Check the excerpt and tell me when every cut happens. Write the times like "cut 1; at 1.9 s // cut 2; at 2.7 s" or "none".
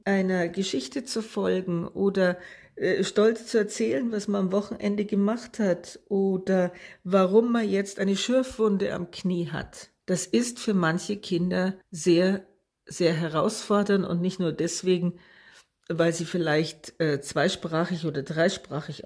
none